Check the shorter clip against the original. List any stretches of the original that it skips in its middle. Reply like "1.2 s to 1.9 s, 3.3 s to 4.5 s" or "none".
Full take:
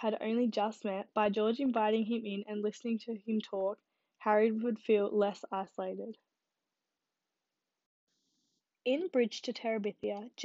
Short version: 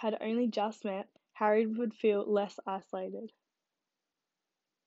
1.1 s to 4.0 s